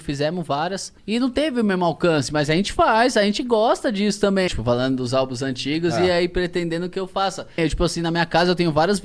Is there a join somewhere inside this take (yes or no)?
yes